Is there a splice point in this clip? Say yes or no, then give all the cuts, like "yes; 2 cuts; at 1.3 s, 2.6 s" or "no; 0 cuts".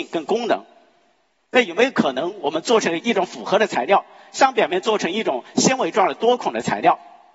yes; 1 cut; at 1.4 s